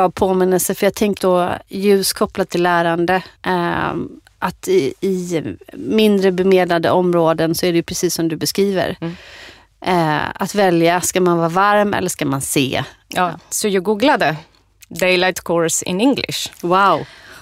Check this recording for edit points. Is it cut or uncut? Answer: cut